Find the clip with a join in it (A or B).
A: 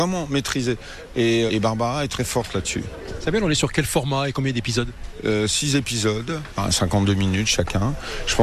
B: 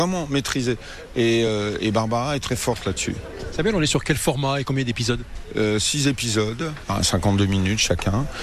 A